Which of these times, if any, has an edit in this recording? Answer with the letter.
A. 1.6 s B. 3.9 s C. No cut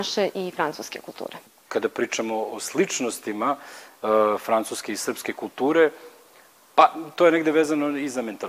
C